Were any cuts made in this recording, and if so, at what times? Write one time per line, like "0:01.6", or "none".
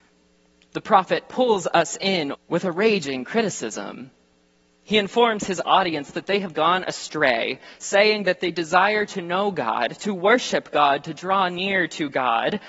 0:02.3